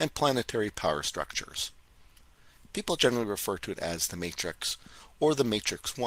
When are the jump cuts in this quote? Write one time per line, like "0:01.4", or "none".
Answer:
0:03.0